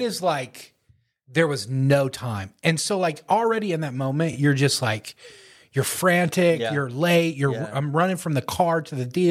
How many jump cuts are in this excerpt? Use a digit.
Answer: 0